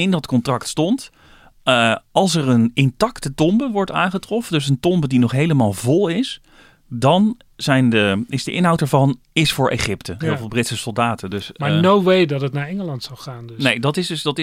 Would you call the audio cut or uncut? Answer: cut